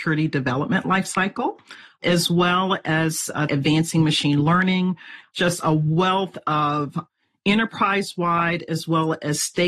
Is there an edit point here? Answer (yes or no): yes